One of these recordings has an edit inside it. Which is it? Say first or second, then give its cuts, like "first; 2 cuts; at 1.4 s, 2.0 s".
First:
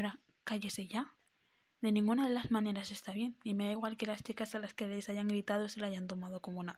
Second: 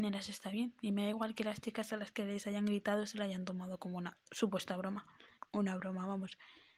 second; 1 cut; at 5.4 s